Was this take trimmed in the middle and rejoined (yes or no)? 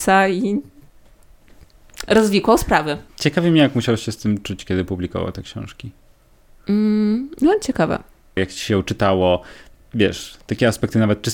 yes